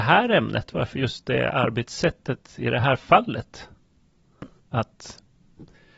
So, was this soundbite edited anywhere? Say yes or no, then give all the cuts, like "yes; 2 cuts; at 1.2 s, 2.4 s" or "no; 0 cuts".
yes; 1 cut; at 4.6 s